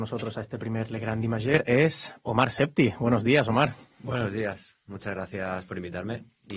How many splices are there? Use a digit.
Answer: 0